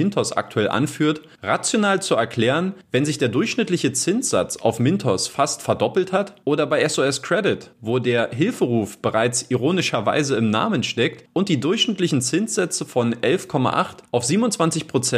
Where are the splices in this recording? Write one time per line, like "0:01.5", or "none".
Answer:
none